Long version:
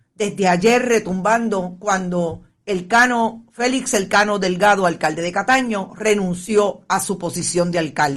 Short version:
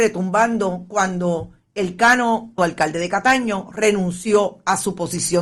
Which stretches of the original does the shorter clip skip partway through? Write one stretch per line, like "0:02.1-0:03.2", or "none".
0:03.5-0:04.8